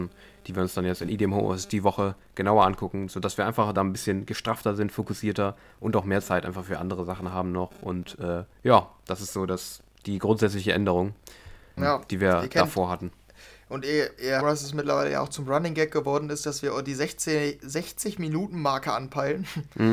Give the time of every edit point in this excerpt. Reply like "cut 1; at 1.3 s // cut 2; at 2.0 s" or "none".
cut 1; at 8.5 s // cut 2; at 11.8 s // cut 3; at 14.4 s